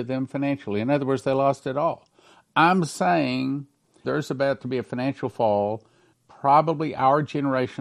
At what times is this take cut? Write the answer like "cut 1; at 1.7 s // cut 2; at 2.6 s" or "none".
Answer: cut 1; at 4.0 s // cut 2; at 6.1 s

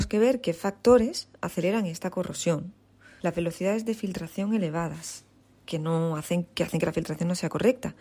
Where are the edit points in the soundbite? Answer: cut 1; at 3.2 s

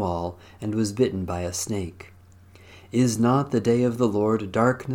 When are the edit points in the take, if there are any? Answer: none

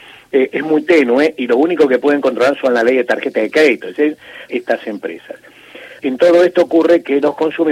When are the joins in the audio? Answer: cut 1; at 4.5 s // cut 2; at 6.0 s

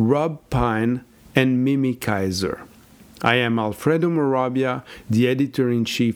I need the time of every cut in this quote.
none

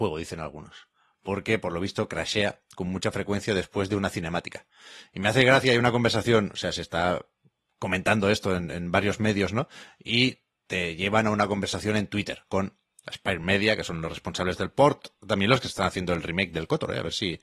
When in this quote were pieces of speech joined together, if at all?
cut 1; at 12.8 s

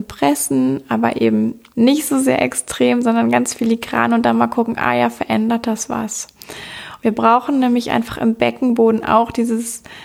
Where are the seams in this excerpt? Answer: none

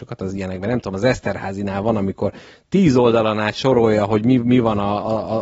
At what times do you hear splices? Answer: none

